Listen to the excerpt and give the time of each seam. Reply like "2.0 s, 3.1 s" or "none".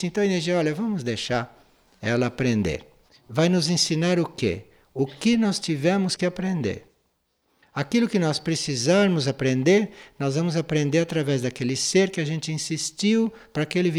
3.1 s